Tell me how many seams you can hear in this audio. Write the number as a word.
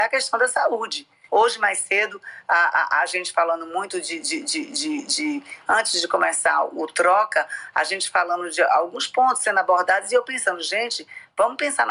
one